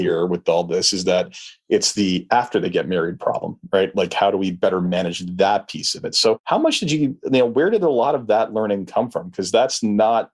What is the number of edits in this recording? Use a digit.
0